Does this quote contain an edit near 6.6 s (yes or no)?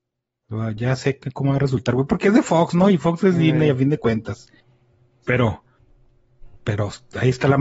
yes